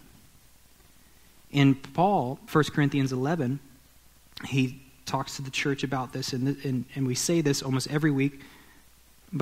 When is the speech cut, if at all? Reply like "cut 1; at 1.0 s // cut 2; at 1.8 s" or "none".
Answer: cut 1; at 2.5 s